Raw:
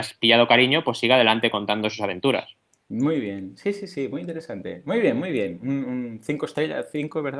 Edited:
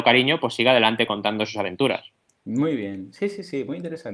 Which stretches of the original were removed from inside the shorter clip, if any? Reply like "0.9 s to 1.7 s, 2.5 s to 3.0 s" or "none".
none